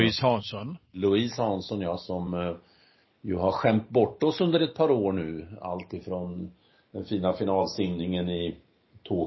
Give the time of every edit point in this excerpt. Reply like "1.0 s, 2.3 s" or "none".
none